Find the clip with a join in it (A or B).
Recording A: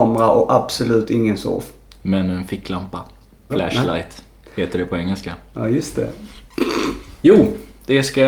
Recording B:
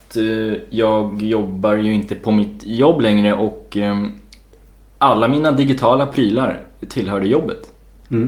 A